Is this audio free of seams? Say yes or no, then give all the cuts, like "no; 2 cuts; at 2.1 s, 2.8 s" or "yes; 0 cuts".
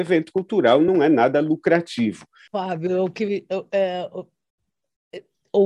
no; 1 cut; at 2.5 s